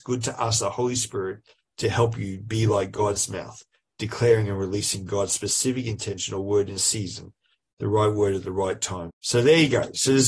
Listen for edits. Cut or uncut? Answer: cut